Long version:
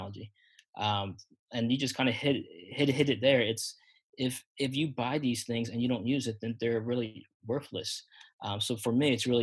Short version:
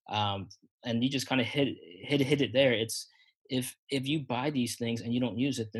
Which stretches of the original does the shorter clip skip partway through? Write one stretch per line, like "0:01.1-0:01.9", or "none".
none